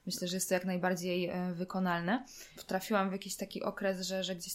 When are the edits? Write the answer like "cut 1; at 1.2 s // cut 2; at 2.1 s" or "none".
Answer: cut 1; at 2.5 s